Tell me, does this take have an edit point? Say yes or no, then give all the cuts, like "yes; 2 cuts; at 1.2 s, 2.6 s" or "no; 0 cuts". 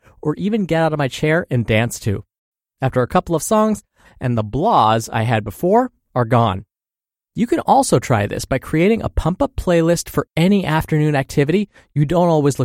yes; 1 cut; at 4.0 s